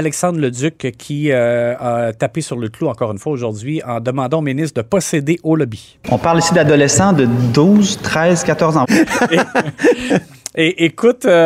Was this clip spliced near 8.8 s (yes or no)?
yes